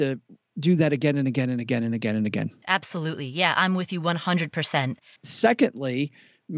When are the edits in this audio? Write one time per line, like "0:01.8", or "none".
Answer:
0:02.6
0:05.2

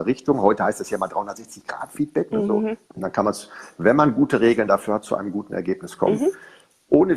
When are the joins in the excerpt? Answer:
0:02.8

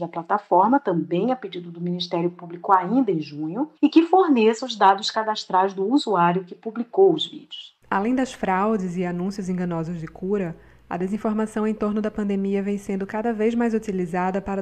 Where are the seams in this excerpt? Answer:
0:03.8
0:07.8

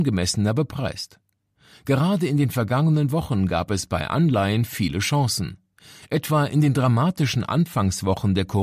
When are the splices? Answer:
0:01.7

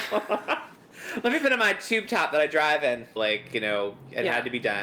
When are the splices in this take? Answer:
0:03.2

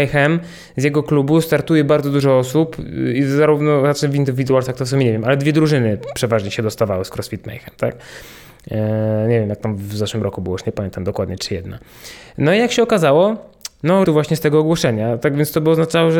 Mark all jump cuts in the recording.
0:11.4
0:14.0

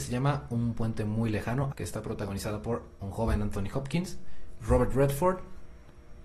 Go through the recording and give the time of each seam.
0:01.7
0:04.6

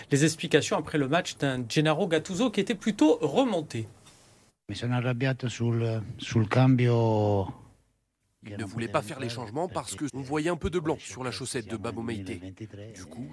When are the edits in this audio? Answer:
0:08.4
0:10.1

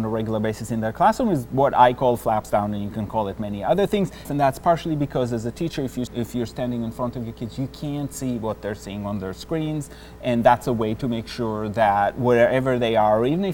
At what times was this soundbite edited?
0:04.3
0:06.1

